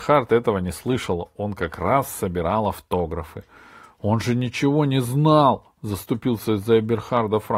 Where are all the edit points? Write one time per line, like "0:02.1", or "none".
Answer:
none

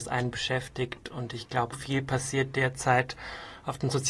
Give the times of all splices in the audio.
0:01.7

